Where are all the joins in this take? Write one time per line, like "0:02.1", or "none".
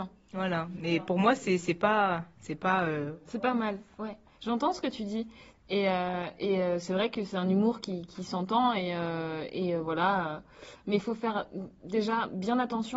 none